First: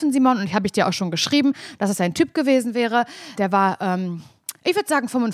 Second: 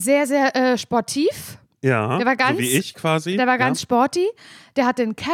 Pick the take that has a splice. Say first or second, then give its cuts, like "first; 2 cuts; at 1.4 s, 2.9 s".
first; 1 cut; at 3.4 s